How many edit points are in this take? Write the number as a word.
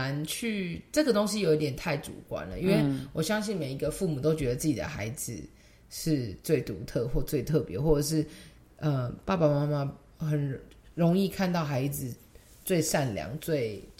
zero